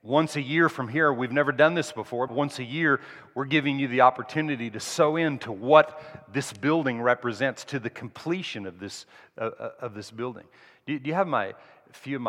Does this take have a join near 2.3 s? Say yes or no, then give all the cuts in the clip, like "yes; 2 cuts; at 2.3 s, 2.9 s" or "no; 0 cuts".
yes; 1 cut; at 2.3 s